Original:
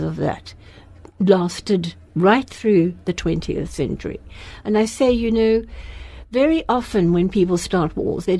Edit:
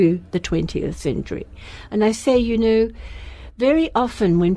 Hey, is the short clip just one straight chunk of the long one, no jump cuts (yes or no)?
yes